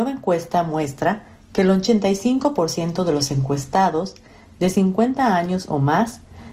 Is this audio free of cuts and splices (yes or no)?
yes